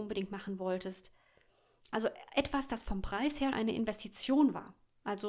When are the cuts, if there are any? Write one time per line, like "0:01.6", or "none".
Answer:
0:03.5